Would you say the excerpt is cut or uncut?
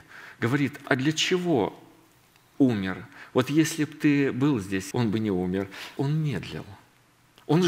cut